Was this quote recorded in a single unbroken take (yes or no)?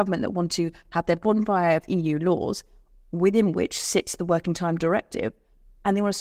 yes